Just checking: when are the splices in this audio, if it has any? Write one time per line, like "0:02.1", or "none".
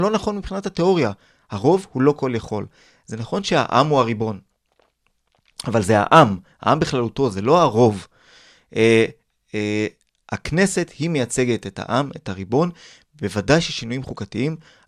none